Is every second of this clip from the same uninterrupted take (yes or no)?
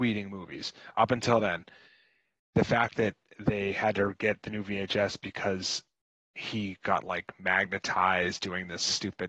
yes